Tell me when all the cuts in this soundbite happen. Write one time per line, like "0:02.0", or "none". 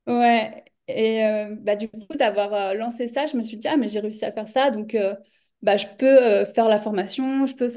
none